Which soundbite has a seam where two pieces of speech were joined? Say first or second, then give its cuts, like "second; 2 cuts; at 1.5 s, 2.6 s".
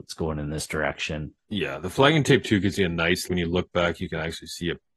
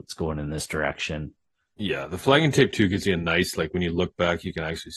first; 2 cuts; at 1.4 s, 3.3 s